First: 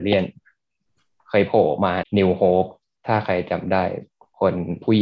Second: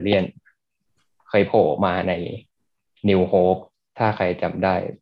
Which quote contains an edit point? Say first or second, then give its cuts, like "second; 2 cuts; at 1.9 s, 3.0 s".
first; 1 cut; at 2.0 s